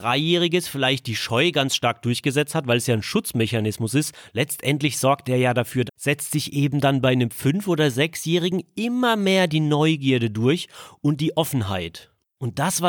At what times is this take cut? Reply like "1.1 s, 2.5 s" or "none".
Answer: 5.9 s